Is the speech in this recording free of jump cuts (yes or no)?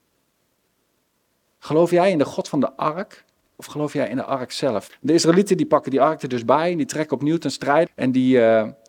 no